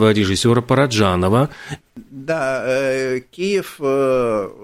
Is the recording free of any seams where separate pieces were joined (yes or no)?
no